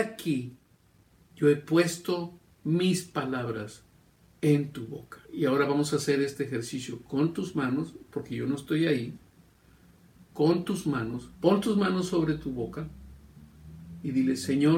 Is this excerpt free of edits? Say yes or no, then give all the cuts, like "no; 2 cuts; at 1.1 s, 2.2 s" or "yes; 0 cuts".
no; 2 cuts; at 5.2 s, 11.3 s